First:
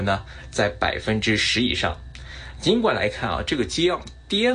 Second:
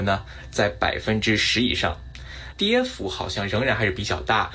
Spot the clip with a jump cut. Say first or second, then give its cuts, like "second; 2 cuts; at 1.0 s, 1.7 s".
second; 1 cut; at 2.5 s